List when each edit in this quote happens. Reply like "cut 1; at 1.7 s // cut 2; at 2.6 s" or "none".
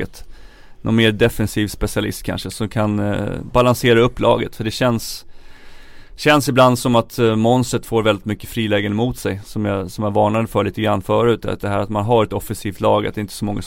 cut 1; at 11.6 s